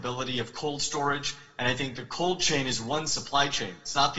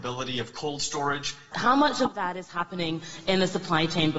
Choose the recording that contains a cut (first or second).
second